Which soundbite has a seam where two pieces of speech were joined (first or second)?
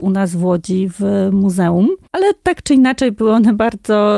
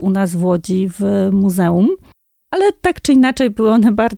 first